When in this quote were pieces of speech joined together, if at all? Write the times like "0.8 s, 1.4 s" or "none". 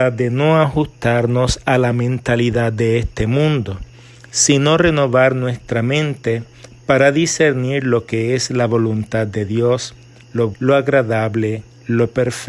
10.5 s